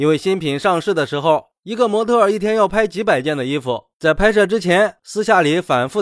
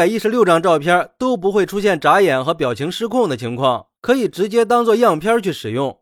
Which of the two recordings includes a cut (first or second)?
first